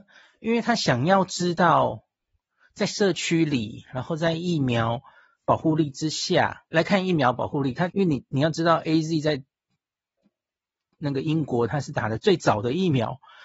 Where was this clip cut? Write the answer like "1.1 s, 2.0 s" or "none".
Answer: 6.7 s, 7.9 s